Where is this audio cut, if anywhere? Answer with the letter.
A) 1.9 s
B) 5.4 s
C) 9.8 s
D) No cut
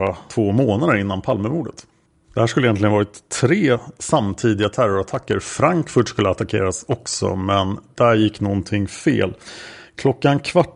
D